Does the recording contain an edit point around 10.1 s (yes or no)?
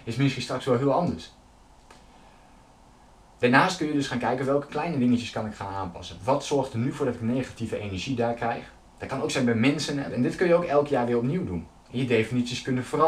yes